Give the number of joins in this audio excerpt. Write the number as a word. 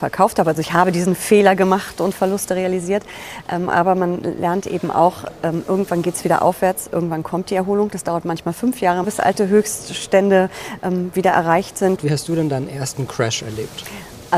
two